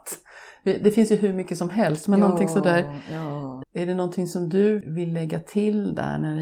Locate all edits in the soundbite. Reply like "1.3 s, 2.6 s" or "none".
3.6 s, 4.8 s